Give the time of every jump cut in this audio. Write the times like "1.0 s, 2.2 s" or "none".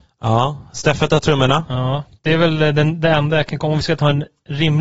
2.2 s